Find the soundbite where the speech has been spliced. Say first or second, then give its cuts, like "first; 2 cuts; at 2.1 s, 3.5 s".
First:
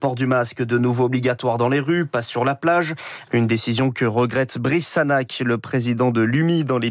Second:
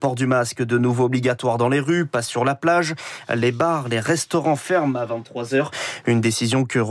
first; 1 cut; at 3.3 s